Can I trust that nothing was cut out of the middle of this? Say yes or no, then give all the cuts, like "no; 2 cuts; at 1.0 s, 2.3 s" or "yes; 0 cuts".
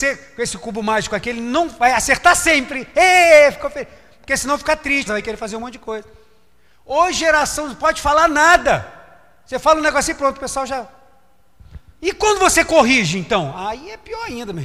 no; 1 cut; at 5.1 s